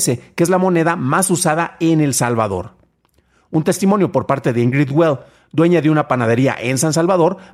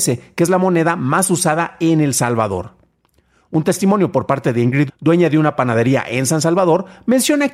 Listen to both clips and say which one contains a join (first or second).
second